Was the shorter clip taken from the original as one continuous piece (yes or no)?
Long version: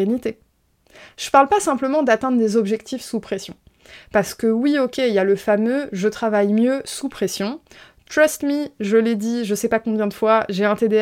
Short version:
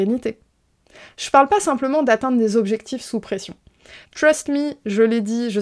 no